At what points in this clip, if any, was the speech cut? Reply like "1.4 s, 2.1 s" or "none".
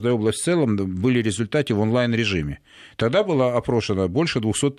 none